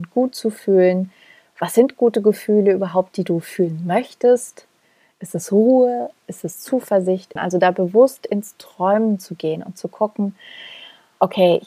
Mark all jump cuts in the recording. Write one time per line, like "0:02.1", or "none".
0:07.4